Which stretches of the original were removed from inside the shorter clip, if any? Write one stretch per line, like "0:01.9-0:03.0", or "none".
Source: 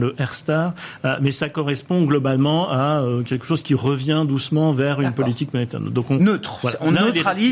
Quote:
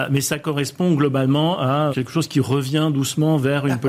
0:03.0-0:03.2